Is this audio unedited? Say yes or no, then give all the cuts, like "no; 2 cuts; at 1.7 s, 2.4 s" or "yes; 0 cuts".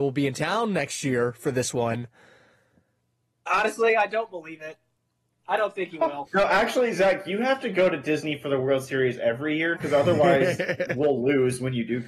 no; 2 cuts; at 6.3 s, 9.8 s